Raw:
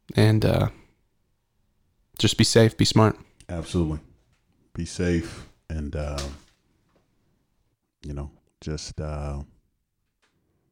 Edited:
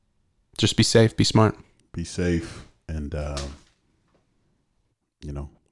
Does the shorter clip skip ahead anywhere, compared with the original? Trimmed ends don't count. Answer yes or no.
yes